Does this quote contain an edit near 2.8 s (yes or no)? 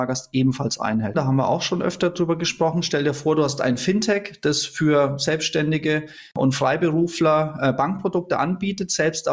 no